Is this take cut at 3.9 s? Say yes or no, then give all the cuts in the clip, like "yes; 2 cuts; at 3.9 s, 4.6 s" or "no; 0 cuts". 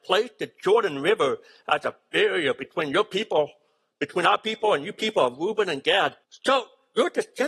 no; 1 cut; at 6.2 s